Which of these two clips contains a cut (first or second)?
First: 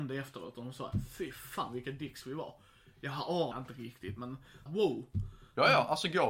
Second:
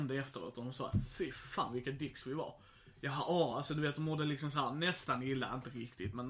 first